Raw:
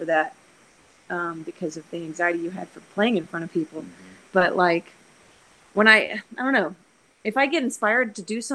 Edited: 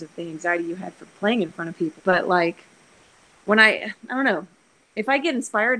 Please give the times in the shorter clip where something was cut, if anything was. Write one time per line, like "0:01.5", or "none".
0:02.0